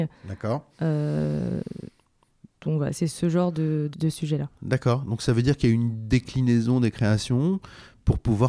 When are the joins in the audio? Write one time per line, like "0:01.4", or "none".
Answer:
0:03.9